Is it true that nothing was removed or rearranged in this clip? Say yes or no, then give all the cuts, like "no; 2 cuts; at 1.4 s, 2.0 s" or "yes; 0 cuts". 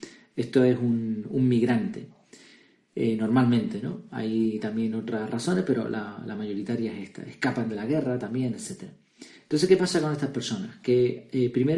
yes; 0 cuts